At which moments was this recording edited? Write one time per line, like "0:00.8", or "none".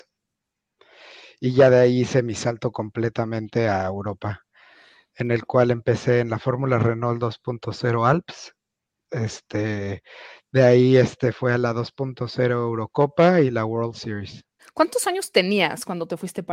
0:14.6